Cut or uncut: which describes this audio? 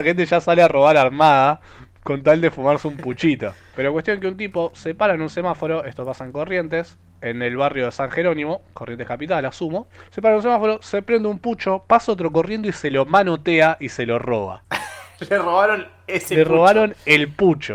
cut